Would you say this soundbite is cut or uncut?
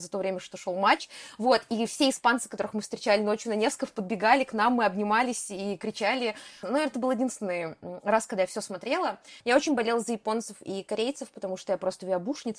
cut